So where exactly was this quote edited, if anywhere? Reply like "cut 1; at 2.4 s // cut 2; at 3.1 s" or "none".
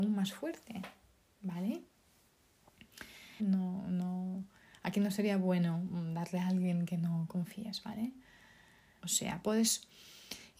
cut 1; at 3.4 s // cut 2; at 9.0 s